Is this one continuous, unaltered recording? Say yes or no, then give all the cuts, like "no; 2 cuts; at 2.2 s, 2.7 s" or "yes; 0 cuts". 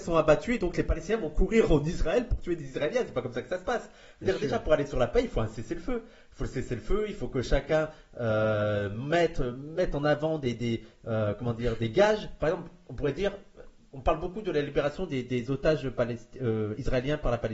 yes; 0 cuts